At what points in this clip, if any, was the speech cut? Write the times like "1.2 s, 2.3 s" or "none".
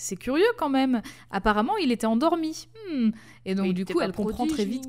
none